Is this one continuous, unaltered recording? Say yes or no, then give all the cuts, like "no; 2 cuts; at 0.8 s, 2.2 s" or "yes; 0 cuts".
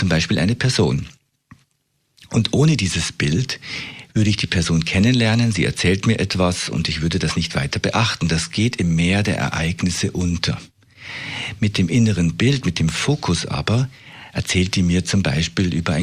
yes; 0 cuts